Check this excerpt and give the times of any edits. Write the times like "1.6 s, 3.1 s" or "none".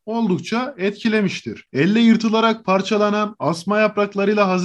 1.7 s

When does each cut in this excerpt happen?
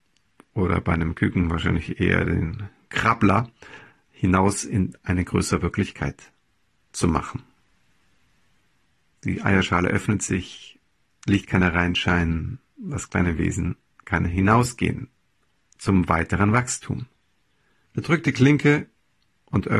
17.9 s

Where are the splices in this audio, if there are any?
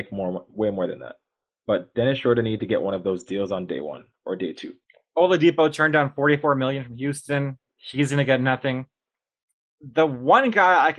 none

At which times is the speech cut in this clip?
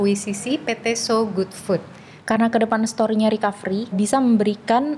2.2 s, 3.9 s

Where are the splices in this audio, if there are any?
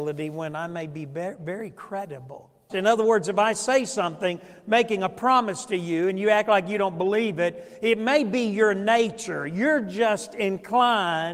2.7 s

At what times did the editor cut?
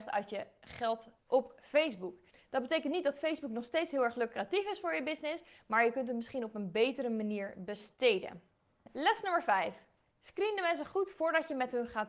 1.2 s

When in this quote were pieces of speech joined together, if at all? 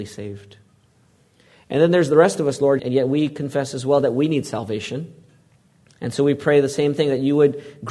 2.8 s, 5.9 s

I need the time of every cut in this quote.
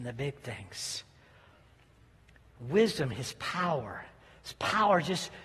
none

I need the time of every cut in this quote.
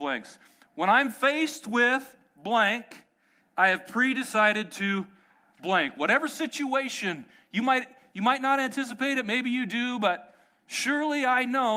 none

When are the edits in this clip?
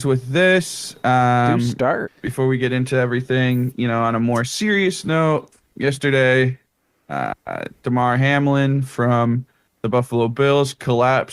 2.1 s, 5.7 s

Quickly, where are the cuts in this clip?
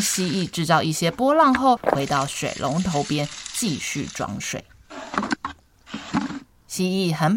1.8 s

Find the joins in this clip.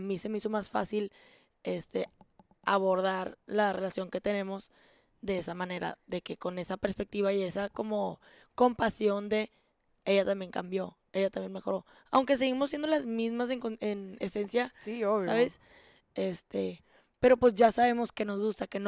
none

